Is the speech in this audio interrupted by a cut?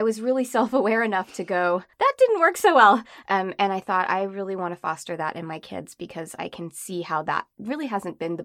yes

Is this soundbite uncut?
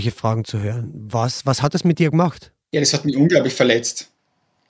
yes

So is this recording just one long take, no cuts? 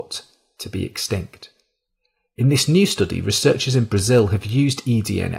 yes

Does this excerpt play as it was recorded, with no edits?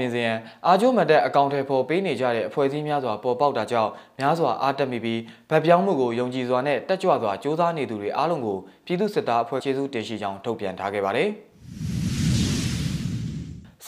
no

